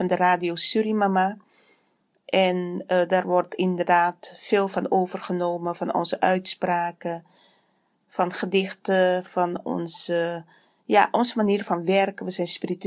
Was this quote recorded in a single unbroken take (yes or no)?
yes